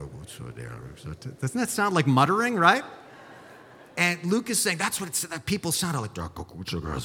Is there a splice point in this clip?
no; 0 cuts

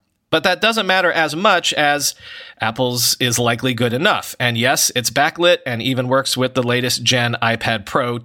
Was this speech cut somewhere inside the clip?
no; 0 cuts

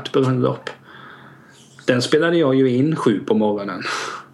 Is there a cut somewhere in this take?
no; 0 cuts

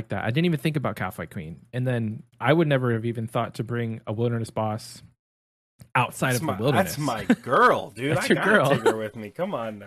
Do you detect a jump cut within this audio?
no; 0 cuts

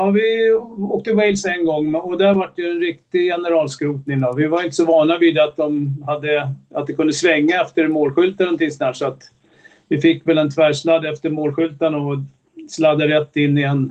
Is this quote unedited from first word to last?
yes; 0 cuts

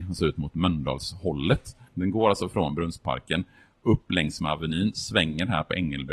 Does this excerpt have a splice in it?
yes; 1 cut; at 1.9 s

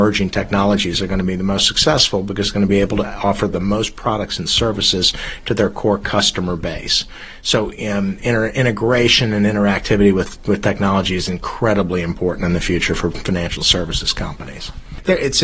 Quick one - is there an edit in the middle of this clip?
yes; 1 cut; at 8.2 s

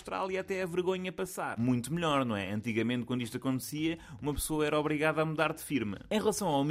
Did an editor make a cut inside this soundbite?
no; 0 cuts

